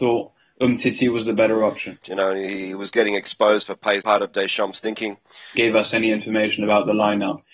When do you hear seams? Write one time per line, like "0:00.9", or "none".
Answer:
0:02.0
0:04.0
0:05.5